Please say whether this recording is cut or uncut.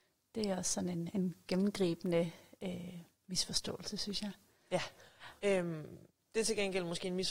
cut